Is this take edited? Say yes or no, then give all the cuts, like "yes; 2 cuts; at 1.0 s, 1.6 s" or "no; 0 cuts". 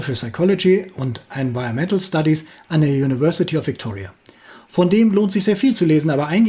no; 0 cuts